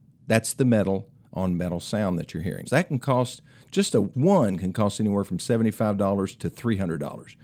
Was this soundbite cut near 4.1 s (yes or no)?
yes